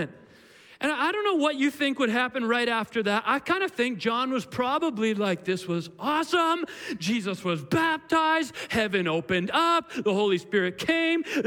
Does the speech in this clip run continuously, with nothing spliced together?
yes; 0 cuts

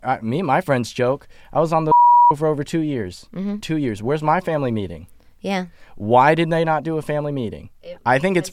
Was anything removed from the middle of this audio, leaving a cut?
no; 0 cuts

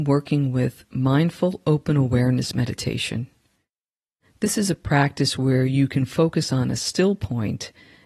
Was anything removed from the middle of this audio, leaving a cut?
no; 0 cuts

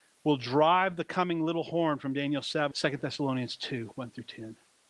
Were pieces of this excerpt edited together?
yes; 1 cut; at 2.7 s

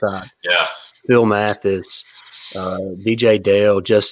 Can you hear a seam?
yes; 1 cut; at 0.9 s

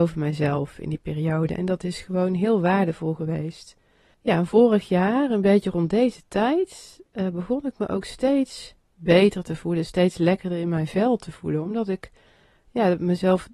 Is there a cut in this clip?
no; 0 cuts

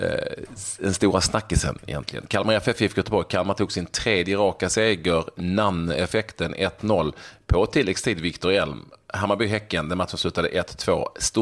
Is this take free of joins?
yes; 0 cuts

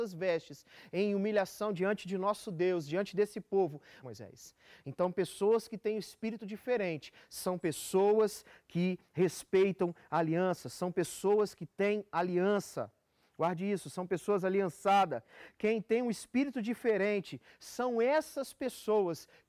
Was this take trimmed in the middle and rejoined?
yes; 1 cut; at 4.0 s

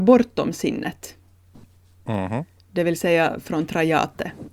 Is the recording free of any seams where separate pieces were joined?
yes; 0 cuts

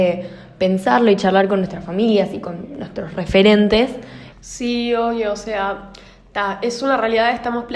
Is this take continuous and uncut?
no; 1 cut; at 4.3 s

